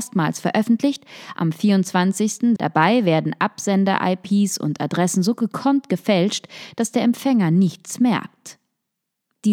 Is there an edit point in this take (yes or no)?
yes